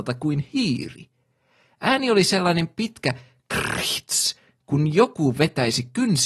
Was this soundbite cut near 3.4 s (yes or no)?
yes